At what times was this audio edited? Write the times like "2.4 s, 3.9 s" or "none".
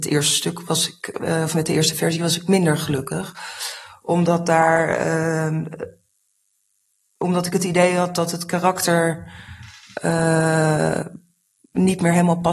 none